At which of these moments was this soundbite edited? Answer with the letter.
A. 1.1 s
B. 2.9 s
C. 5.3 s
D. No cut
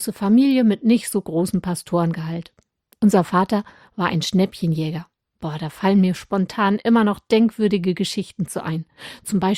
D